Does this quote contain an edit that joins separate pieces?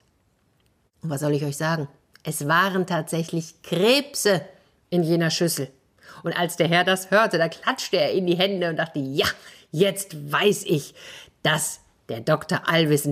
no; 0 cuts

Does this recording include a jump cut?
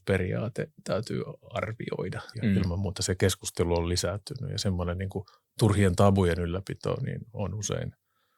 yes; 1 cut; at 2.3 s

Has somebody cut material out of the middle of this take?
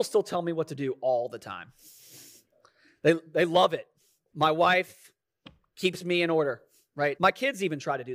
yes; 2 cuts; at 4.3 s, 7.1 s

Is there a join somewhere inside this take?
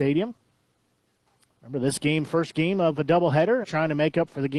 yes; 2 cuts; at 1.5 s, 3.6 s

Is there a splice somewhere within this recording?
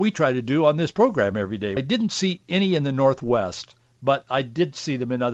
yes; 1 cut; at 1.8 s

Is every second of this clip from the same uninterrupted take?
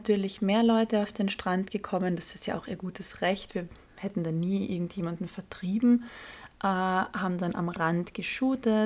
yes; 0 cuts

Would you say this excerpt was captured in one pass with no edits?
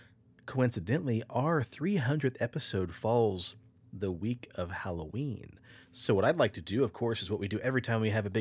yes; 0 cuts

